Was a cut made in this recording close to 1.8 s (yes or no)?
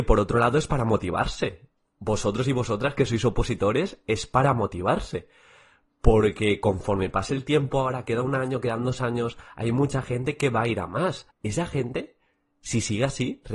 no